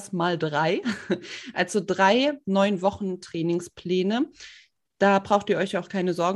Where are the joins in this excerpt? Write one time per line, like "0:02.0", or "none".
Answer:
none